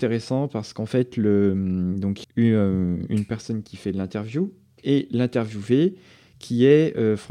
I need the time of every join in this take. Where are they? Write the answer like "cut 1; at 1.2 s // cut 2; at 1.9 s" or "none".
cut 1; at 2.2 s